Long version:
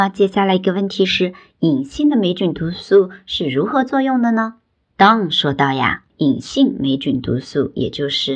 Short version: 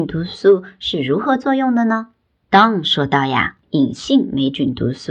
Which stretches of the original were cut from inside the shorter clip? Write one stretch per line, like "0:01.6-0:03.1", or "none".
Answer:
none